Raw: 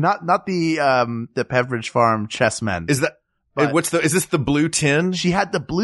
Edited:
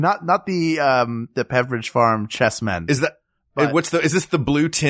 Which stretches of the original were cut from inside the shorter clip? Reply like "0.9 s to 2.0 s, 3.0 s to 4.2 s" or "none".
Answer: none